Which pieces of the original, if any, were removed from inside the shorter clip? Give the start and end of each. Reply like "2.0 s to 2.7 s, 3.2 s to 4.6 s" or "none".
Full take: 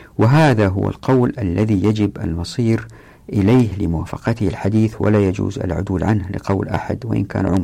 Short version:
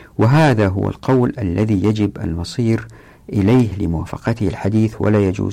none